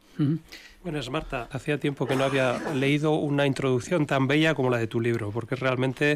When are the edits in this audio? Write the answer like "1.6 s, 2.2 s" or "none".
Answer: 1.5 s